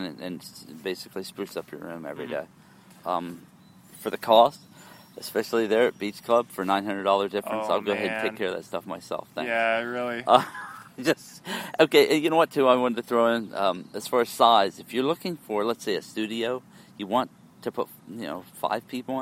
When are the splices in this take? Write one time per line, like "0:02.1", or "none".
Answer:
none